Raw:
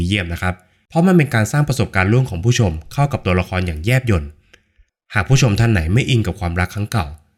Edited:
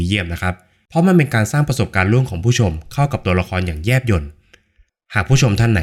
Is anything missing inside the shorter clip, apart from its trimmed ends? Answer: no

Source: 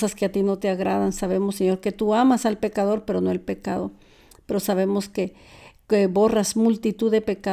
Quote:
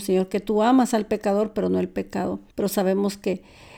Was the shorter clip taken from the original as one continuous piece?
no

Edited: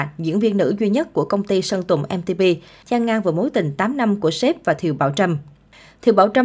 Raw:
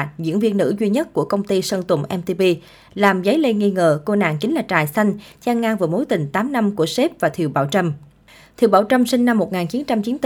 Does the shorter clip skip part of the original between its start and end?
yes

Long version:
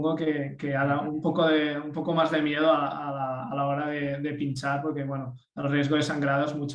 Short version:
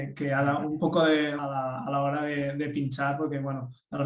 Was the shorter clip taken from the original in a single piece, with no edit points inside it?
no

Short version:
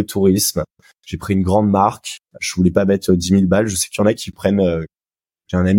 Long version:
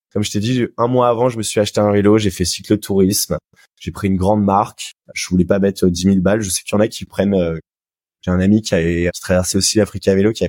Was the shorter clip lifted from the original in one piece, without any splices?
yes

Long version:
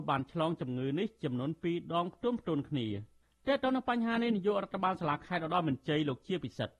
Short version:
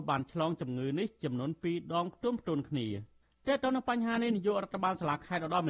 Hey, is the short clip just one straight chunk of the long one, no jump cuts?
yes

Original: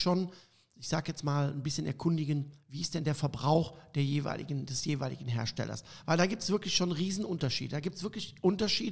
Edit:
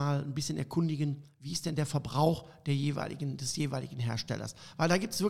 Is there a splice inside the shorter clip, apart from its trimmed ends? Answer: no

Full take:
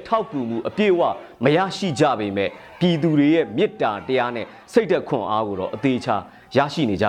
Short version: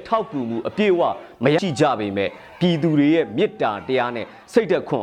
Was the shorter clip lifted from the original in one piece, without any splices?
no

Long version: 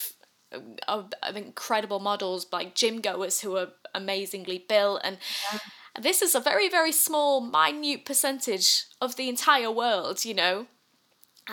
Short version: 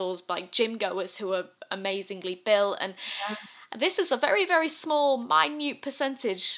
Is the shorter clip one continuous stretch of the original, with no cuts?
yes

